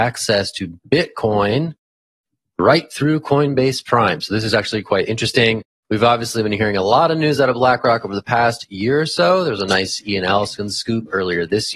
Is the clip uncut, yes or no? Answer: yes